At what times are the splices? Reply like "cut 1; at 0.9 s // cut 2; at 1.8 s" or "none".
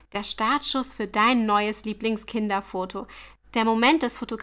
cut 1; at 3.4 s